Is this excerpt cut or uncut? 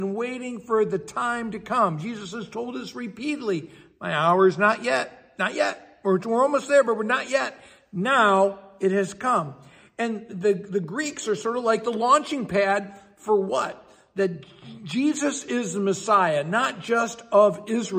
uncut